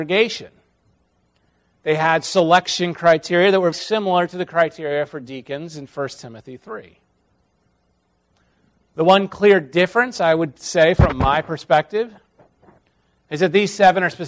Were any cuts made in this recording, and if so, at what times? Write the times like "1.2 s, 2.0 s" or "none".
3.7 s